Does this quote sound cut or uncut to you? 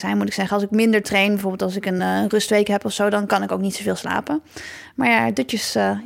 uncut